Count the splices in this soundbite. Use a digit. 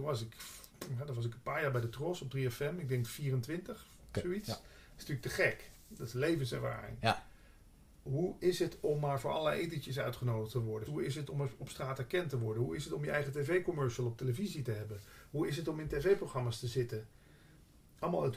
1